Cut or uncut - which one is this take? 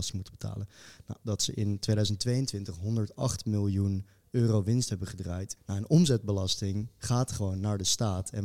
cut